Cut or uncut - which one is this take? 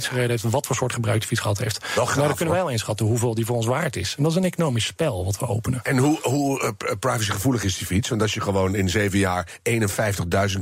uncut